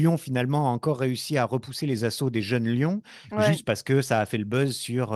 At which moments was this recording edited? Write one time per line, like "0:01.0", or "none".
0:03.3